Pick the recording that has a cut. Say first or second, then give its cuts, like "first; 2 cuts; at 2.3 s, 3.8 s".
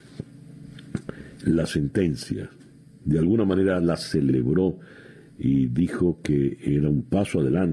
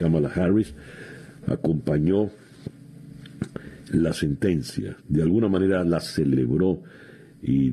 second; 1 cut; at 5.0 s